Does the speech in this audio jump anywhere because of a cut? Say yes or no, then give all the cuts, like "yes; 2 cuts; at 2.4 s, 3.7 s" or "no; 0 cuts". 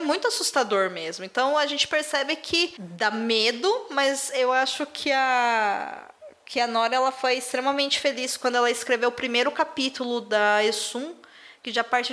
no; 0 cuts